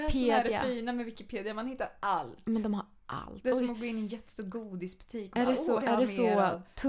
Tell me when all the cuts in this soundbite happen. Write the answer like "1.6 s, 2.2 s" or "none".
5.8 s